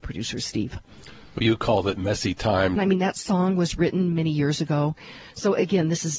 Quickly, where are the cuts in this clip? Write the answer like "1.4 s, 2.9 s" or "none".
2.8 s, 4.1 s